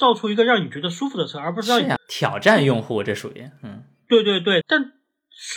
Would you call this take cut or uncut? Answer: cut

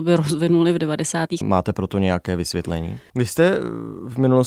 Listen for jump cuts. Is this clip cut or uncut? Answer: cut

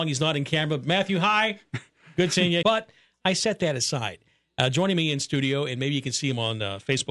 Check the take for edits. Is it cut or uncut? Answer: cut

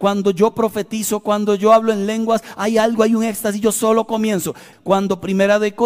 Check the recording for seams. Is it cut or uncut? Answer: cut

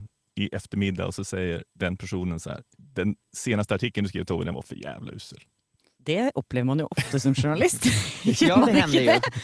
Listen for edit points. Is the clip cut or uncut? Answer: uncut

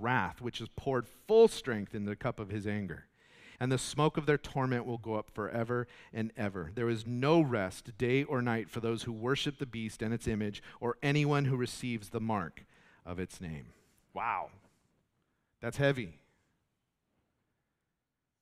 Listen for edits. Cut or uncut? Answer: cut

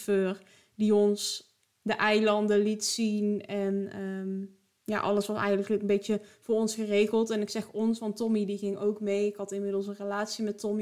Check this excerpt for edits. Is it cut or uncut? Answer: uncut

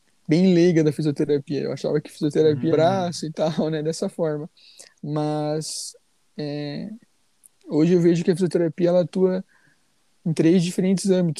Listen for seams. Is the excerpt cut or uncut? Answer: cut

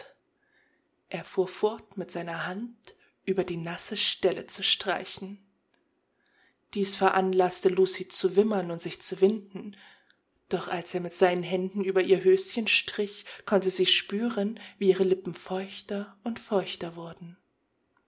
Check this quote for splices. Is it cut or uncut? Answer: cut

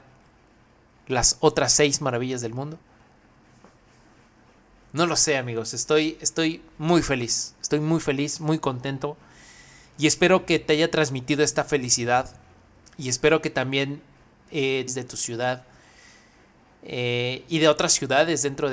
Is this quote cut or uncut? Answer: cut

